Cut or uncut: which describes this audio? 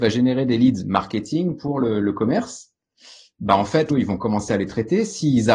cut